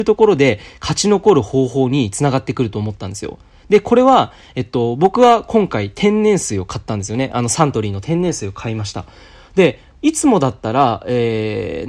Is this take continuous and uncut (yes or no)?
yes